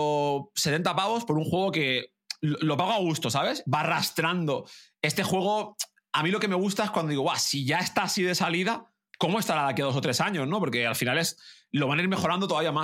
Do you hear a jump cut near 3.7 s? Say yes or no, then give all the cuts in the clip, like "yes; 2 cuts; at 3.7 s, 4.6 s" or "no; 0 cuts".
yes; 1 cut; at 3.7 s